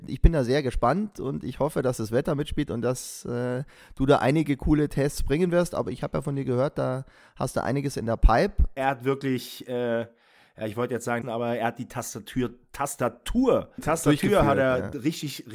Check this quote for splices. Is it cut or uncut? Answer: cut